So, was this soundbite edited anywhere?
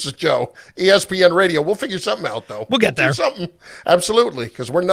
no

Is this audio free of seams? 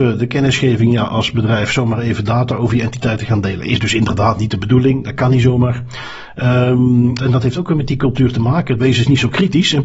no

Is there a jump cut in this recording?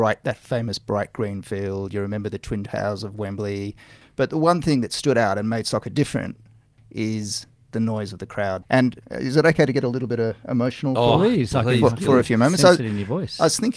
yes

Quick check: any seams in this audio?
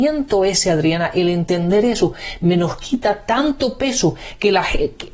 no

